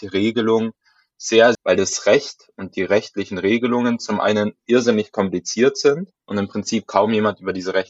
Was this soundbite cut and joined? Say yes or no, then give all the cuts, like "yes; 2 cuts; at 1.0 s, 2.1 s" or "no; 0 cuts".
yes; 2 cuts; at 1.5 s, 6.2 s